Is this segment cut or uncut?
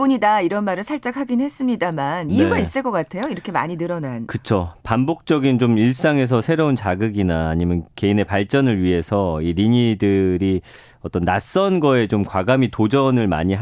uncut